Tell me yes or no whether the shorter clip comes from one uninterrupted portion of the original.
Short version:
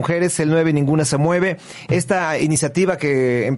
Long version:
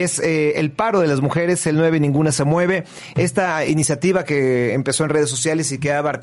yes